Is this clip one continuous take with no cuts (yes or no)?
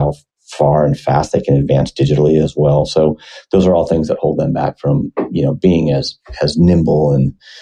yes